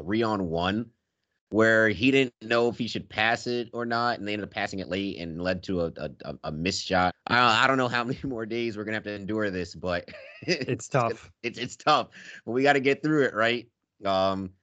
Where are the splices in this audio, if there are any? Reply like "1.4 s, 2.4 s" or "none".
7.1 s